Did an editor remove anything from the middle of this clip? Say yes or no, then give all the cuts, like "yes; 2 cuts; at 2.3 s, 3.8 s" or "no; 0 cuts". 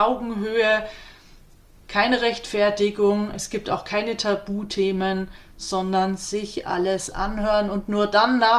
yes; 1 cut; at 1.8 s